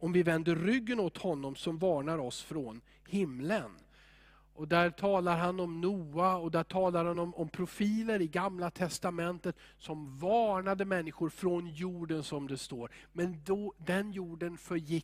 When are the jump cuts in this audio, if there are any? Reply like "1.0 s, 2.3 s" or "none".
none